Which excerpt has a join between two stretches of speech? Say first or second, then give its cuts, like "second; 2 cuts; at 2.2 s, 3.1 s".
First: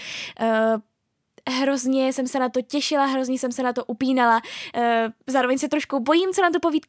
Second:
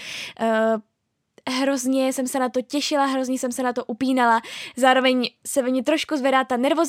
first; 1 cut; at 4.7 s